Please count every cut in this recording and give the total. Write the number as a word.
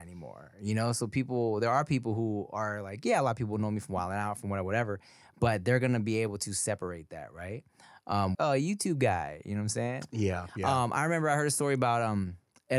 one